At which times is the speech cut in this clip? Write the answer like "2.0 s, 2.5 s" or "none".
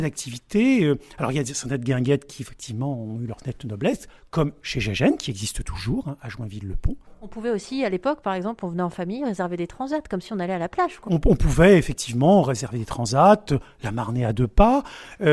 11.0 s